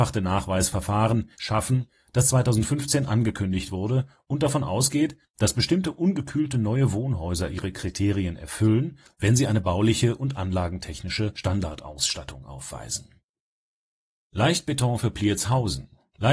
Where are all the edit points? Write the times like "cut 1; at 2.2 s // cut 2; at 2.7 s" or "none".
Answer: cut 1; at 1.3 s